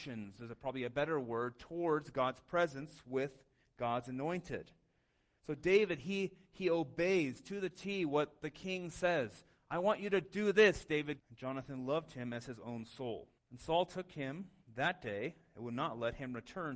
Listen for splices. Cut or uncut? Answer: cut